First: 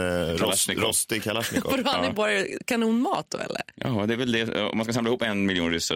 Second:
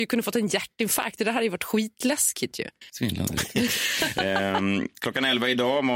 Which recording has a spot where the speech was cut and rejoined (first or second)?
second